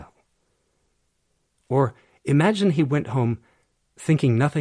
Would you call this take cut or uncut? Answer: uncut